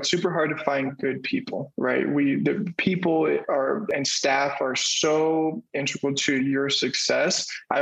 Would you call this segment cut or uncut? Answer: uncut